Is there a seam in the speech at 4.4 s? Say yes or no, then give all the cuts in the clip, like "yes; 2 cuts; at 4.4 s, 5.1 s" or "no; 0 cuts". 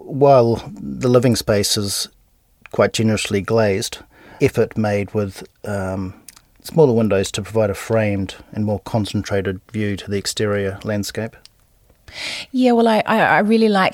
yes; 1 cut; at 4.4 s